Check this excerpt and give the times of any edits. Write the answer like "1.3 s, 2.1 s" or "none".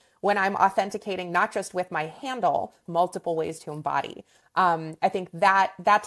2.9 s